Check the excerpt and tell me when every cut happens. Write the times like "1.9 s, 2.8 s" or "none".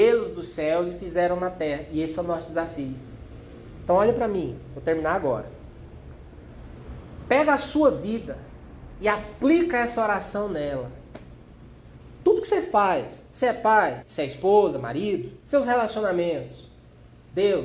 14.0 s, 15.4 s